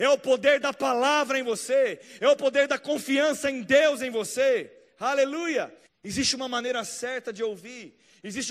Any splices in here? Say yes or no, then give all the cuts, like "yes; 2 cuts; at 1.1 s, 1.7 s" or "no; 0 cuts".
yes; 1 cut; at 5.9 s